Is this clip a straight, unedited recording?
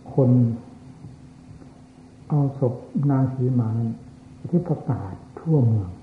yes; 0 cuts

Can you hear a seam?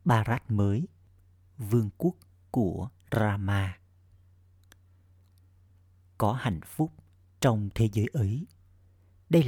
no; 0 cuts

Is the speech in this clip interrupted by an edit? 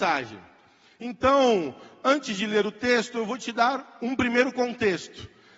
no; 0 cuts

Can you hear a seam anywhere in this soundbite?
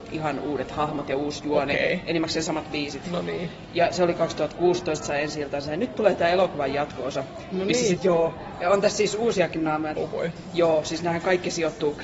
yes; 2 cuts; at 8.0 s, 10.0 s

